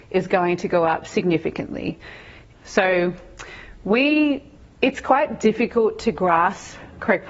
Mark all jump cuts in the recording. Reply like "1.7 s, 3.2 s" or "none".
2.5 s